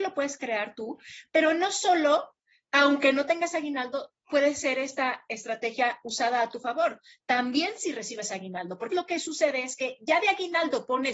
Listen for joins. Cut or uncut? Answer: cut